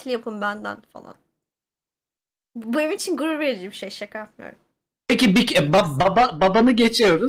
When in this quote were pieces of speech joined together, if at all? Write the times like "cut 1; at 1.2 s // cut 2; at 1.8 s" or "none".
none